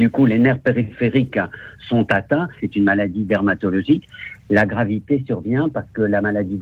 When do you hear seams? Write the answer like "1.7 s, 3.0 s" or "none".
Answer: 2.6 s